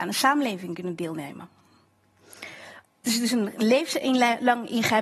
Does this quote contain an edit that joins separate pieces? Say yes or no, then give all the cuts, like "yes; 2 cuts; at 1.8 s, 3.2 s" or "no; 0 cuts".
yes; 1 cut; at 2.8 s